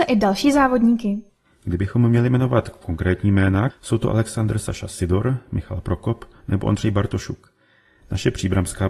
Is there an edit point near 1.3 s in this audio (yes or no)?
no